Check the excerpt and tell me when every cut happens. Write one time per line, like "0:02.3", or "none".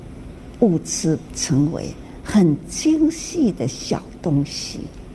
0:01.3